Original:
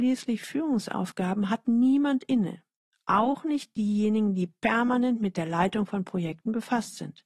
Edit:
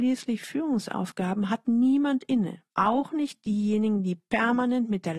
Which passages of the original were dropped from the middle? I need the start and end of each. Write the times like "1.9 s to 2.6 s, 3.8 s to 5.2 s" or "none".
2.7 s to 3.0 s